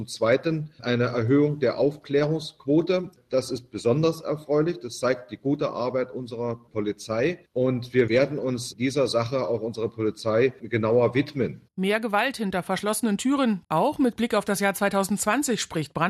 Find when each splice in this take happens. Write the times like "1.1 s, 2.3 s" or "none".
7.4 s, 13.6 s

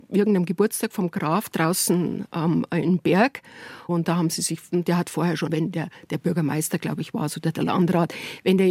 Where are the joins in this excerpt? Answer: 3.9 s, 5.5 s

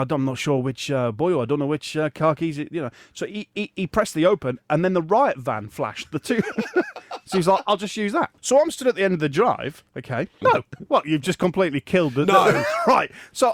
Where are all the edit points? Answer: 8.4 s, 10.4 s

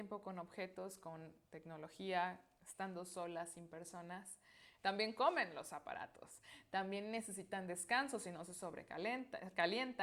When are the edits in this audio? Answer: 4.8 s

